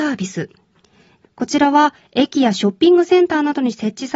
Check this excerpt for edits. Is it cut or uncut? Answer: cut